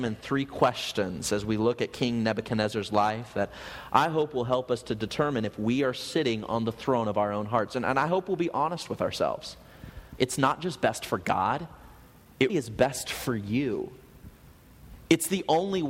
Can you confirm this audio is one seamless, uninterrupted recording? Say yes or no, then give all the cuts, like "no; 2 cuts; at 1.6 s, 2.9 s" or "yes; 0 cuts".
no; 2 cuts; at 10.2 s, 12.5 s